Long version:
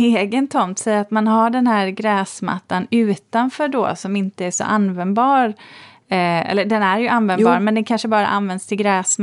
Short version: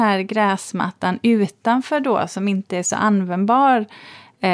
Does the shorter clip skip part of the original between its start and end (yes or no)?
no